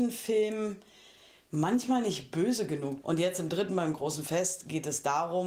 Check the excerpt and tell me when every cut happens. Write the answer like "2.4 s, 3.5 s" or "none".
3.0 s